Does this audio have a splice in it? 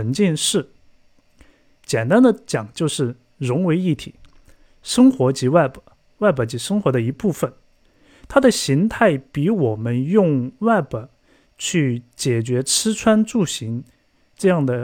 no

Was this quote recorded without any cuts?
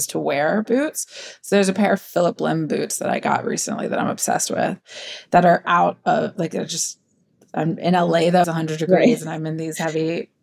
no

